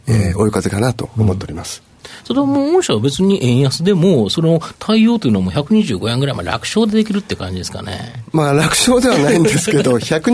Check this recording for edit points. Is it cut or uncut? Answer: uncut